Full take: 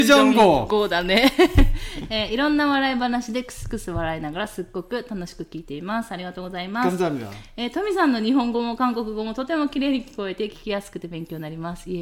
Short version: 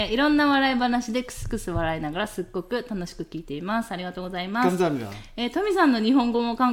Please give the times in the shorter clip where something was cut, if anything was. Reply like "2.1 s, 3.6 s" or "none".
none